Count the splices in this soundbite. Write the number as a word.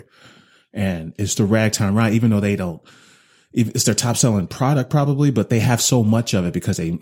zero